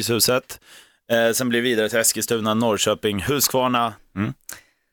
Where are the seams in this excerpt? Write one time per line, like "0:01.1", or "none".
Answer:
0:04.0

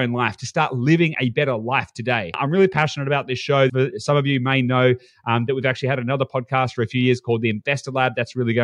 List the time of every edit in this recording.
0:03.7

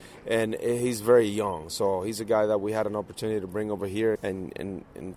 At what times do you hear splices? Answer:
0:04.2

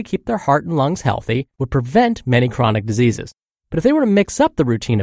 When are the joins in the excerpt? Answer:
0:01.5
0:03.5

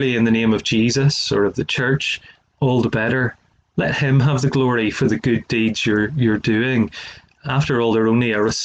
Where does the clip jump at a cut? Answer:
none

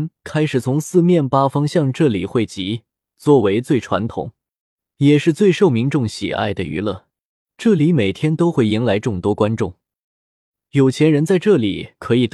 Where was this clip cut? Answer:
none

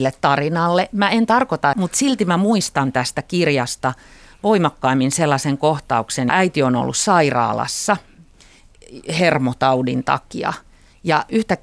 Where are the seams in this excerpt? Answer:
0:01.7
0:06.3

